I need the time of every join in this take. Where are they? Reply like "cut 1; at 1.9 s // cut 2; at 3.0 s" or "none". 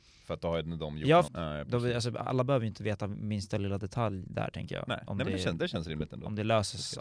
cut 1; at 1.3 s